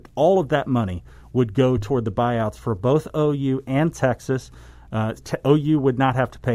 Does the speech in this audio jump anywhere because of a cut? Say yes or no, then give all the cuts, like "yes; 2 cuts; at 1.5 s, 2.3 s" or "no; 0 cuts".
yes; 1 cut; at 5.2 s